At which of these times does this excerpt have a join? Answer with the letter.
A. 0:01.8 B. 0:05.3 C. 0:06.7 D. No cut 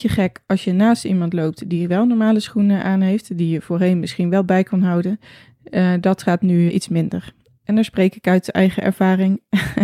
C